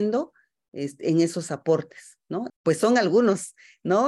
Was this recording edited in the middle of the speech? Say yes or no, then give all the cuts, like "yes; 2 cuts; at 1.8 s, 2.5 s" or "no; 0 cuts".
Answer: yes; 1 cut; at 2.5 s